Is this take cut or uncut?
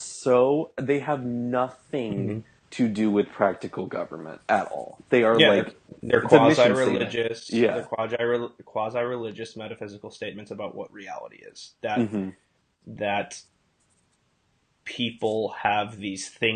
uncut